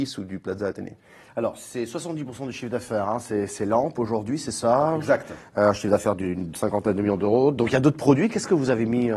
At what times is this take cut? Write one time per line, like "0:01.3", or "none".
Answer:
none